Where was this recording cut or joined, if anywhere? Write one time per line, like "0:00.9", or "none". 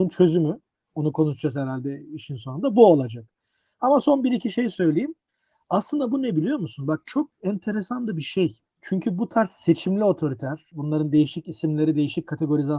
0:08.7
0:10.7